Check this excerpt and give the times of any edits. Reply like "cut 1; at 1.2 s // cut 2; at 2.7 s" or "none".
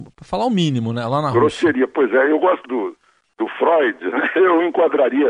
cut 1; at 2.6 s